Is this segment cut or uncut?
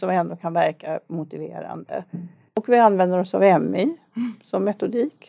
uncut